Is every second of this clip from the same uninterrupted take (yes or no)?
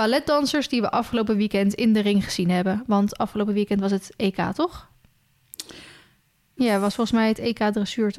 no